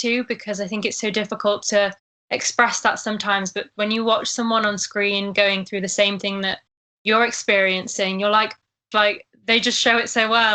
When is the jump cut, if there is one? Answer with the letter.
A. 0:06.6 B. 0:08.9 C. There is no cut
B